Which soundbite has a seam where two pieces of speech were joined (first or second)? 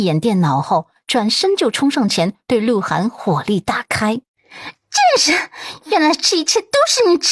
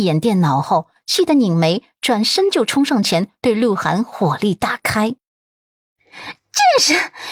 first